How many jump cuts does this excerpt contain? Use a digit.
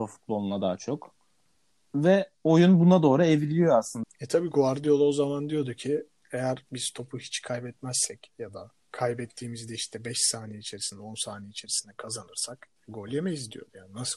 2